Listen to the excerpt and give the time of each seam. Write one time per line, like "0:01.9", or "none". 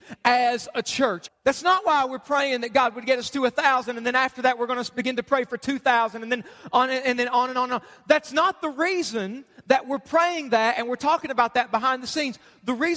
0:01.3